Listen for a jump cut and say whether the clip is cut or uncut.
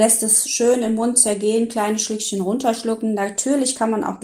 uncut